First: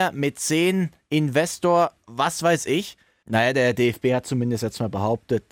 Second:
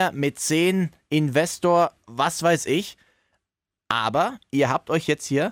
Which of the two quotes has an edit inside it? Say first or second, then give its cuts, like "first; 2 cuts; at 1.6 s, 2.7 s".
first; 1 cut; at 3.2 s